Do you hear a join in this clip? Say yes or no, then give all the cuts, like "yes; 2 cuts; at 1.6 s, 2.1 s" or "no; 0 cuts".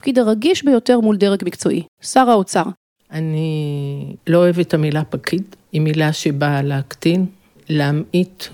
yes; 3 cuts; at 3.0 s, 4.2 s, 5.6 s